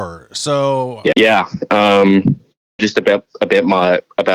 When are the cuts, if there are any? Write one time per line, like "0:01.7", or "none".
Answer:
0:01.1
0:02.8